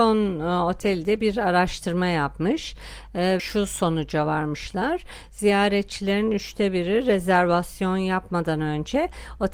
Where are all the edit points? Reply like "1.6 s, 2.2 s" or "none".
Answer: 3.4 s